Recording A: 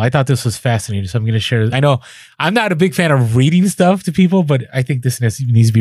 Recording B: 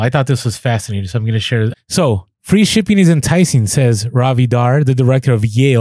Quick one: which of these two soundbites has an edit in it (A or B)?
B